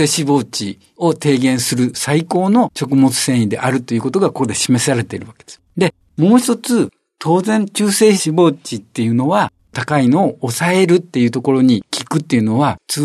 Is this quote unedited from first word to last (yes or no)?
no